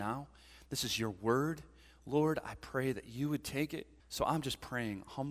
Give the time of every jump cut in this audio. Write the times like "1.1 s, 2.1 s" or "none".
4.0 s